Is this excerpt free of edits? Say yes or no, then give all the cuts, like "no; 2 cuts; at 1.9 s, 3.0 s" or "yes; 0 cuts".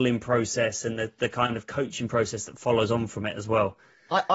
yes; 0 cuts